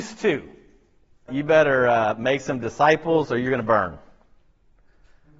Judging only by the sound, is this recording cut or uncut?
cut